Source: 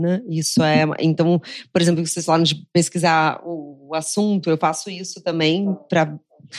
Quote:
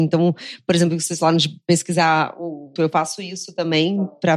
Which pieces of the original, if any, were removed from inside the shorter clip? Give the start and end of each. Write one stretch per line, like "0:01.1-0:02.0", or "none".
0:03.8-0:04.4